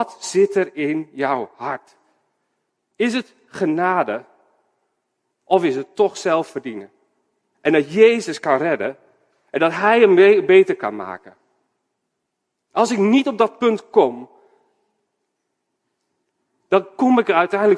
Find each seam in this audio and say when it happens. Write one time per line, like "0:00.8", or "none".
0:07.5